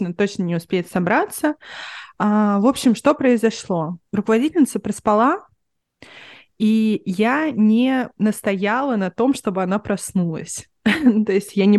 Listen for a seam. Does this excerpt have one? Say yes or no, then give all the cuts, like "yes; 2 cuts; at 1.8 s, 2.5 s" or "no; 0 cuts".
yes; 1 cut; at 4.1 s